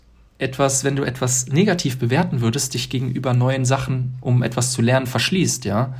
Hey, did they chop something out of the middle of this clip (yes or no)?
no